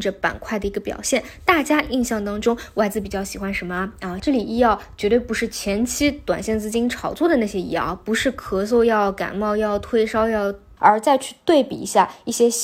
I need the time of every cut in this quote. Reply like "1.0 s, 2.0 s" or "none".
4.2 s, 10.8 s